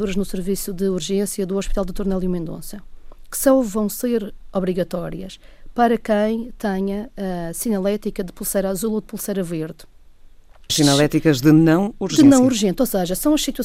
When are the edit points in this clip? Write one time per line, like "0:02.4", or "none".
0:10.7